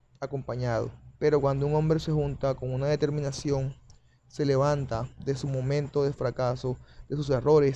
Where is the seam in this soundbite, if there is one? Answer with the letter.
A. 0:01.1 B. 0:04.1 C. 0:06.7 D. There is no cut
A